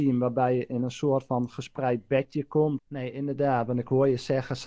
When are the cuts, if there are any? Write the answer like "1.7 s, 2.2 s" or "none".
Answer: 2.8 s